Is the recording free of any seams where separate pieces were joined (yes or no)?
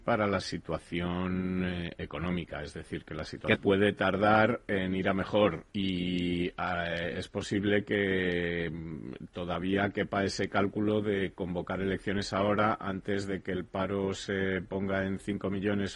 no